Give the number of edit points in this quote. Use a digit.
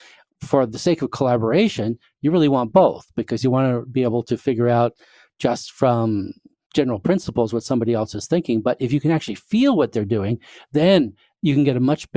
0